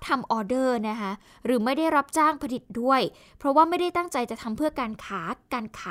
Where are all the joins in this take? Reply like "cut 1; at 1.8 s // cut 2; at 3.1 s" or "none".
none